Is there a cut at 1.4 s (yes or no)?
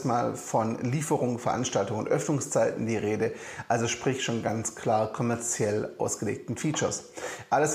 no